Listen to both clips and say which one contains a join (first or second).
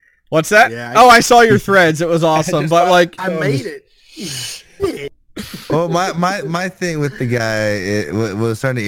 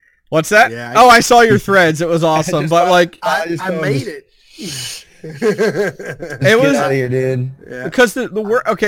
first